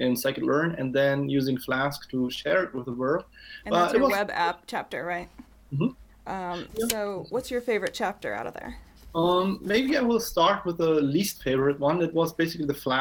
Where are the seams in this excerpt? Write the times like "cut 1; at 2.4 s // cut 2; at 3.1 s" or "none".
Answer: cut 1; at 6.1 s